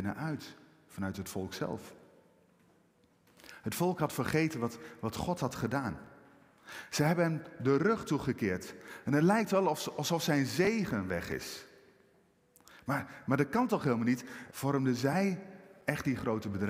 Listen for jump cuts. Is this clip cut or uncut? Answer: cut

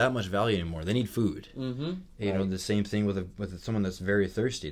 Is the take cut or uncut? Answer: uncut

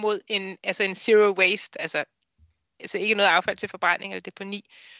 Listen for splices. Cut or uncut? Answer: uncut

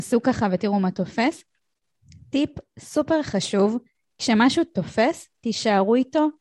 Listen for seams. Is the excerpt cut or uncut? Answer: uncut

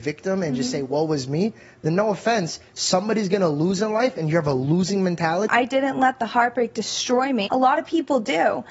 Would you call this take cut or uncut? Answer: cut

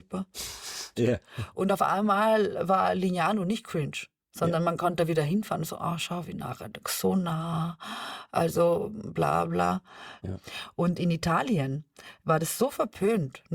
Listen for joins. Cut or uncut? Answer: cut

